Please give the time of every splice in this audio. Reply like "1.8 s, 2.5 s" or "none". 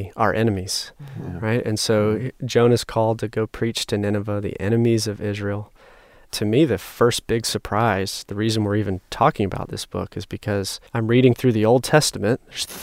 10.9 s